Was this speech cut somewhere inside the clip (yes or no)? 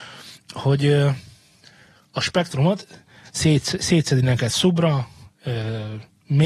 no